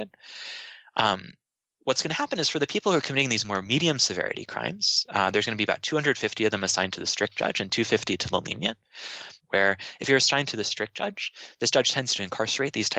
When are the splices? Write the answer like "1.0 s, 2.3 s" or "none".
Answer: 9.4 s